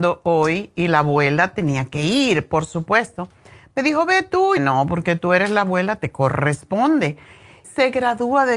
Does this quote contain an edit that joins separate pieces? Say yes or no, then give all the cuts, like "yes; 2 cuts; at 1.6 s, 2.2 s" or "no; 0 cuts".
yes; 2 cuts; at 4.6 s, 7.6 s